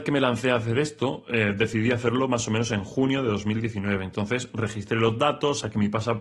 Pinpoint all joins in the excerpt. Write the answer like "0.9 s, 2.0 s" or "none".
none